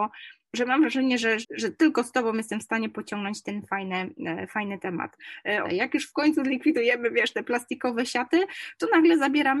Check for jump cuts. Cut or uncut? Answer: cut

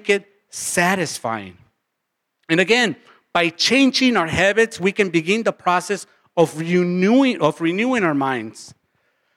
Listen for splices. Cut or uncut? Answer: uncut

